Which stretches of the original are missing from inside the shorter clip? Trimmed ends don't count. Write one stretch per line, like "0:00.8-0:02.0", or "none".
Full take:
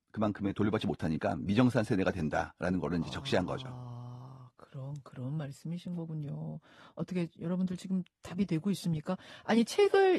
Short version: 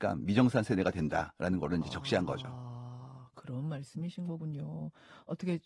0:04.5-0:05.0

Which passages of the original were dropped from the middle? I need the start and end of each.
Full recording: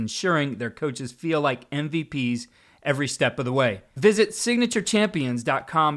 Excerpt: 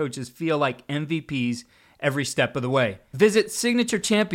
none

